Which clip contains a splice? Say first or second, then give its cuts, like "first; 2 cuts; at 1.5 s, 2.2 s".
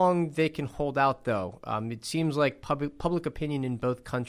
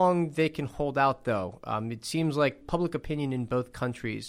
second; 1 cut; at 2.6 s